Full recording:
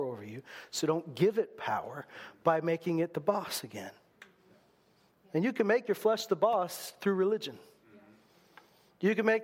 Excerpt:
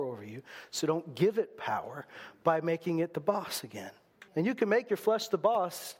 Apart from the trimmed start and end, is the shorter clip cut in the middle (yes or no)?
yes